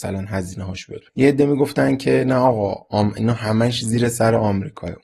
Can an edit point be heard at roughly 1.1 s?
yes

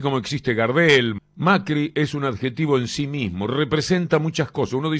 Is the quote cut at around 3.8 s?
no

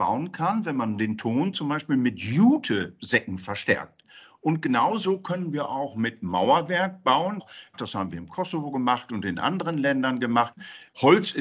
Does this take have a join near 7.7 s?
no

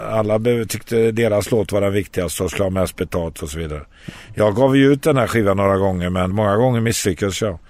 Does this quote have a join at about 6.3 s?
yes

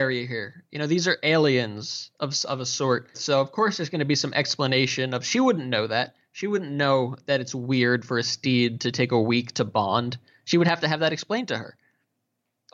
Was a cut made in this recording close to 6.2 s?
no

